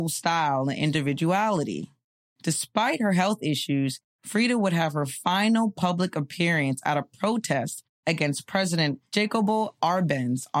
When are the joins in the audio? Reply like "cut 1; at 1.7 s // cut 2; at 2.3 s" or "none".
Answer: cut 1; at 2.3 s